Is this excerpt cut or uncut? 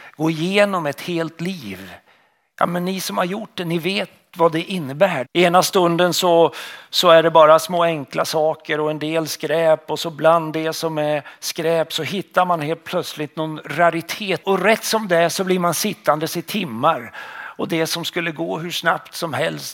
cut